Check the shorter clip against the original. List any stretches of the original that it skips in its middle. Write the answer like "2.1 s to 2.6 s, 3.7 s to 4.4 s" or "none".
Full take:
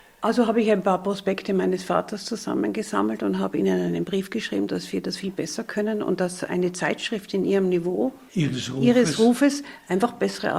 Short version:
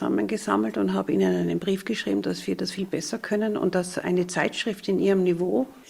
none